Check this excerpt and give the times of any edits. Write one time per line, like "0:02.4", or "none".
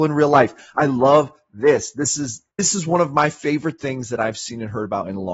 0:02.5